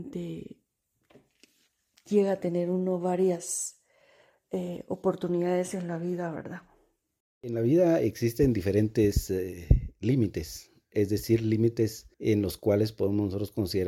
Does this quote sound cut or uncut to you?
cut